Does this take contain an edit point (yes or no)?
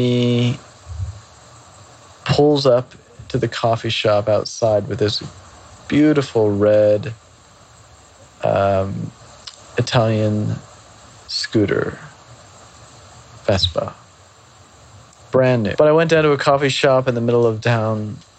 yes